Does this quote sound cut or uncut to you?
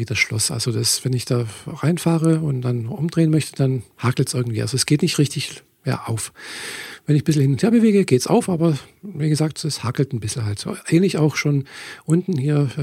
uncut